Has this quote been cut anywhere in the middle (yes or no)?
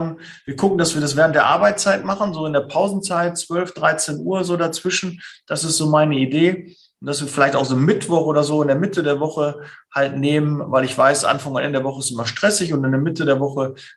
no